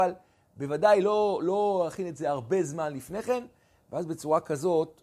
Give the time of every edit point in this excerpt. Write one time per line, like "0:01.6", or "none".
none